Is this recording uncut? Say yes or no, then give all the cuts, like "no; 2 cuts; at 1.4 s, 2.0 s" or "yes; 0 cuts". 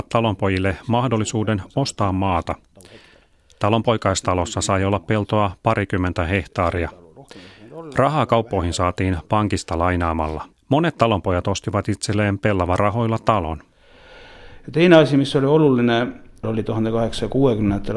no; 1 cut; at 10.5 s